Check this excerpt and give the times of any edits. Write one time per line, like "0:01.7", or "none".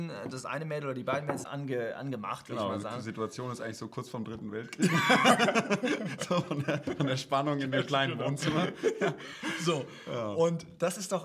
0:01.4